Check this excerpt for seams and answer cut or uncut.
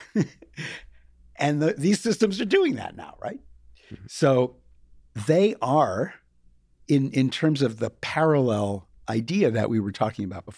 uncut